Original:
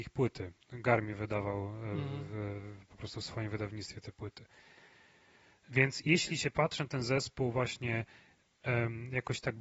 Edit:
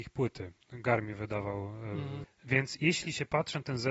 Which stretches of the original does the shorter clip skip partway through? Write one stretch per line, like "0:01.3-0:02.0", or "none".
0:02.2-0:05.5